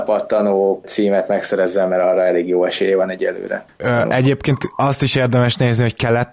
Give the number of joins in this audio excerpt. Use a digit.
1